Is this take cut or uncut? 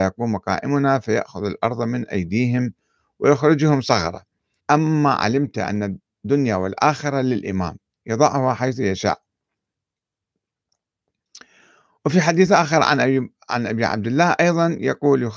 cut